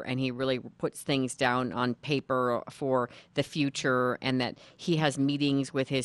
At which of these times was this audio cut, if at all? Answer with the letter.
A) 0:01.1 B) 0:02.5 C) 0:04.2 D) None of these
D